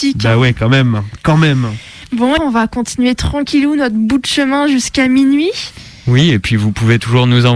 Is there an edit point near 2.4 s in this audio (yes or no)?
yes